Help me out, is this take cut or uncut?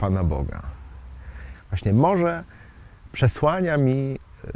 cut